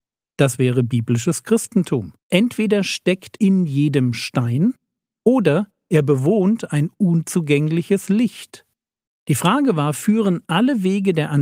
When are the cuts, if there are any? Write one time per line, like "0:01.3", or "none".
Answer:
0:02.2
0:03.4
0:09.1